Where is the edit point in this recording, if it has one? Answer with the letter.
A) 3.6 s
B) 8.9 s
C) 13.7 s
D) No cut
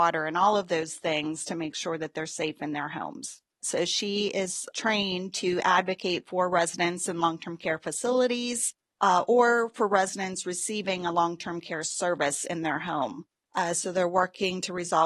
A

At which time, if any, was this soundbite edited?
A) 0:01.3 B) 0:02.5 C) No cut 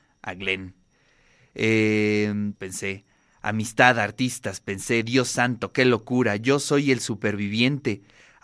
B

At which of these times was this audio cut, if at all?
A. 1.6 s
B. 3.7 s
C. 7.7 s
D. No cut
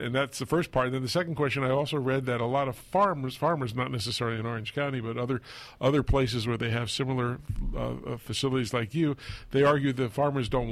D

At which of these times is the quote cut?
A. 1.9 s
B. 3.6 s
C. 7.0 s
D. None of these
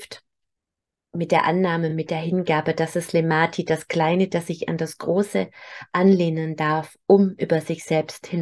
D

